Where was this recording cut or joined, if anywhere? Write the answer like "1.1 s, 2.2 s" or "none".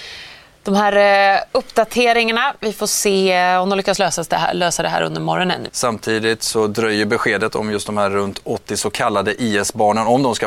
5.7 s